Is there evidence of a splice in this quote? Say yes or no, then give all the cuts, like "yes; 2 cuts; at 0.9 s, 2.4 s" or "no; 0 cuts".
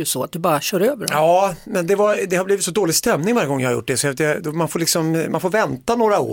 no; 0 cuts